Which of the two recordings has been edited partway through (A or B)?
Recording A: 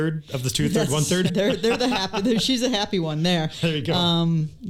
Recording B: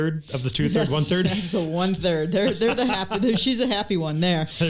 A